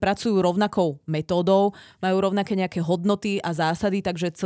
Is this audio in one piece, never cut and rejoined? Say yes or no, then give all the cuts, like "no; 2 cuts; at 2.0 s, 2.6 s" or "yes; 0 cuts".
yes; 0 cuts